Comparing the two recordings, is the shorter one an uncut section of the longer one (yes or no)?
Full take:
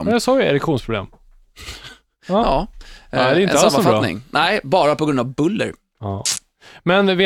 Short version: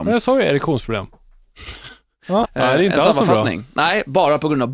no